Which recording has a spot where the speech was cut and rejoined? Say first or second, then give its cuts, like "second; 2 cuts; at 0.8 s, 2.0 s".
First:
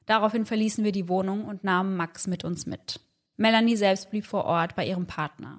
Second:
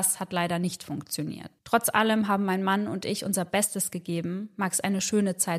second; 1 cut; at 1.6 s